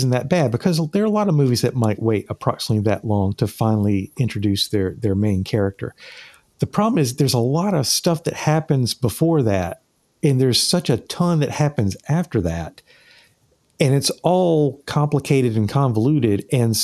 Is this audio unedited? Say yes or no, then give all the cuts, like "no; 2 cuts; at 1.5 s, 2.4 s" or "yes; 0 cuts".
yes; 0 cuts